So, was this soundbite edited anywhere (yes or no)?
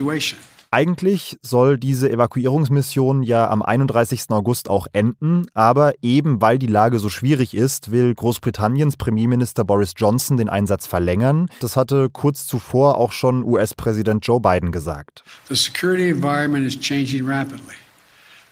yes